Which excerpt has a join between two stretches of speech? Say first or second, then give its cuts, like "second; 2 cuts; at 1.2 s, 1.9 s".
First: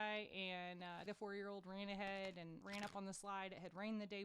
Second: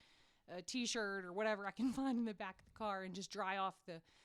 first; 2 cuts; at 1.1 s, 2.6 s